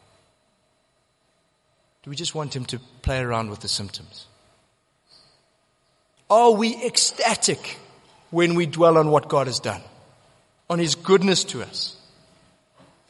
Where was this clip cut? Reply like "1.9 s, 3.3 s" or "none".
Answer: 6.2 s

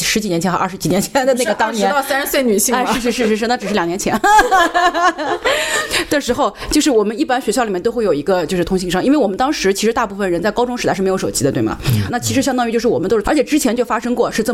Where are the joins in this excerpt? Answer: 12.1 s, 13.2 s

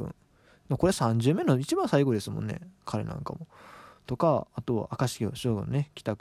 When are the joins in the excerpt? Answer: none

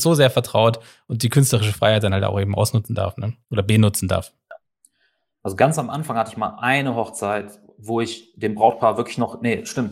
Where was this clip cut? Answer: 3.4 s

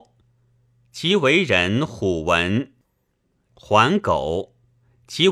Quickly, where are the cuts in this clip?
3.5 s

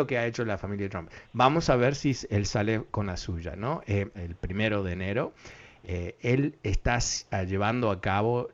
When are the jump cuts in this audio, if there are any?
1.2 s, 4.1 s

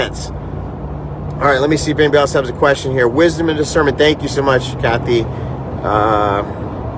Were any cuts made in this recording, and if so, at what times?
none

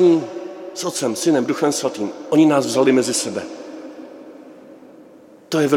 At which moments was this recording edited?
none

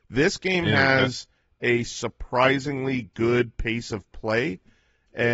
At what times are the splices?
none

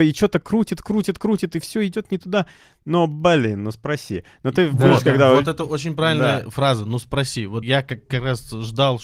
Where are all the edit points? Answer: none

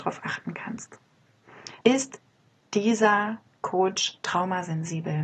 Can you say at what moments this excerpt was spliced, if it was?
1.8 s

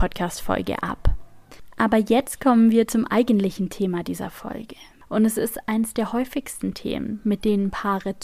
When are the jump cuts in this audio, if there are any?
none

